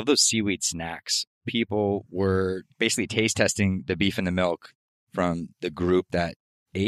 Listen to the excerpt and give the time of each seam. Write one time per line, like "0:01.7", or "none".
0:01.3